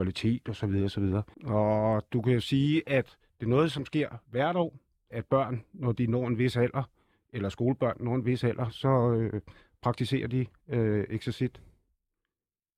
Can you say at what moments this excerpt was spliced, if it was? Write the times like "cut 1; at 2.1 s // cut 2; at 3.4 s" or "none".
cut 1; at 1.3 s // cut 2; at 5.1 s

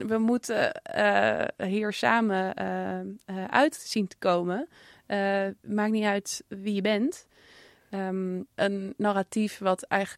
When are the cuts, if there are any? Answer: cut 1; at 8.5 s

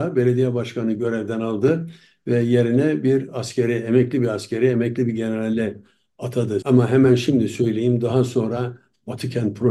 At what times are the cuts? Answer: cut 1; at 6.6 s

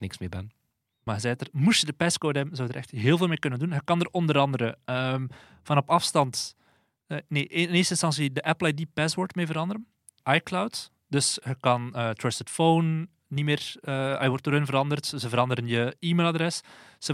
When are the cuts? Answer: cut 1; at 10.2 s

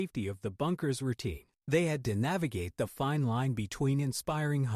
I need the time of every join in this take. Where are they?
cut 1; at 1.6 s

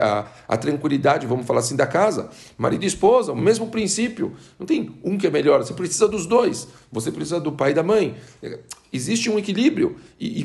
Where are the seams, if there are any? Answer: none

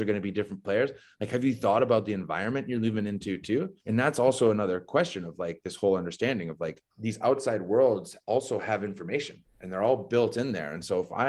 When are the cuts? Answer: cut 1; at 3.8 s // cut 2; at 6.9 s

